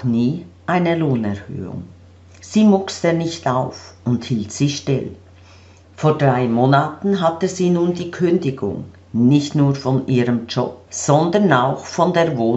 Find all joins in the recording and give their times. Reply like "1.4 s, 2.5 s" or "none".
5.8 s, 10.9 s

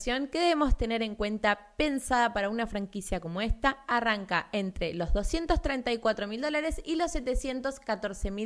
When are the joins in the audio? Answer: none

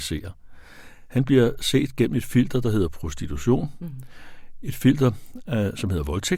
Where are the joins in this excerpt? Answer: none

